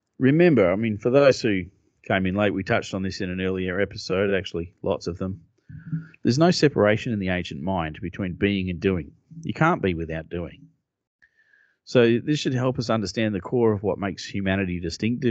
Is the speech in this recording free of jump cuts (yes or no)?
yes